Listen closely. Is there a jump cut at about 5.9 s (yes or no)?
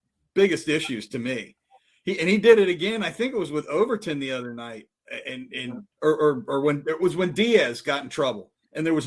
yes